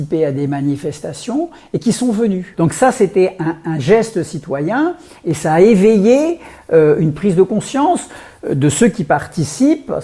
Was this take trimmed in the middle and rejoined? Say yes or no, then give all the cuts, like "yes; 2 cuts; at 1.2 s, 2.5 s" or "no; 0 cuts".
no; 0 cuts